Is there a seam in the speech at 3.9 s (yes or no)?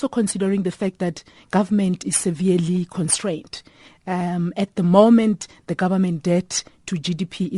no